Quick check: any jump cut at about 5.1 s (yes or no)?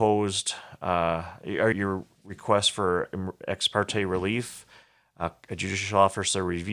no